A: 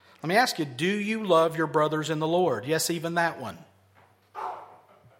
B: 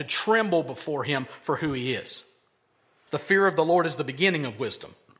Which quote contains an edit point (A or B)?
B